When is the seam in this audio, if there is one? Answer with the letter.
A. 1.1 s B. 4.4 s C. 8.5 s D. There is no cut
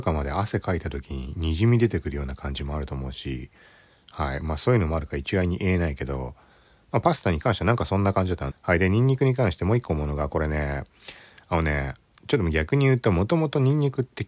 C